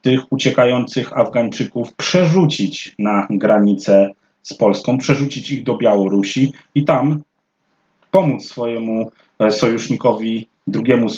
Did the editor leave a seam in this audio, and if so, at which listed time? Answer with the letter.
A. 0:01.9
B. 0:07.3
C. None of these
A